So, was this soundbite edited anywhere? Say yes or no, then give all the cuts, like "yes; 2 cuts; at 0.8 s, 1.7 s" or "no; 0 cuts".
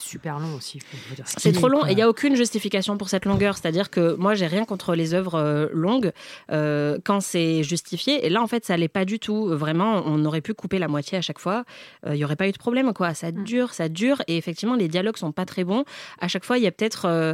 no; 0 cuts